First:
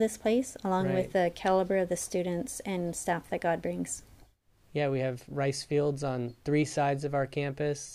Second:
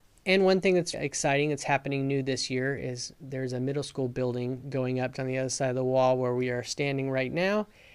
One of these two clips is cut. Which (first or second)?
second